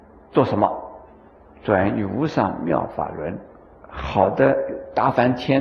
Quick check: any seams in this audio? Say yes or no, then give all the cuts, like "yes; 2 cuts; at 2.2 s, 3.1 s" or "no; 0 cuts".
yes; 1 cut; at 3.7 s